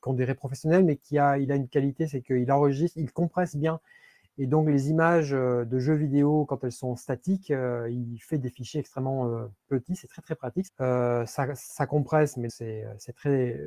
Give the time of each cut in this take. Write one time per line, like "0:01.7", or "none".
0:10.7
0:12.5